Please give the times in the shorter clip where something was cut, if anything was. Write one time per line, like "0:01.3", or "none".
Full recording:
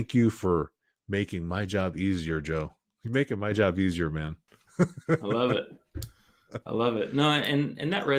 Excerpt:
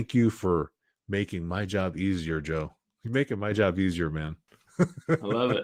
none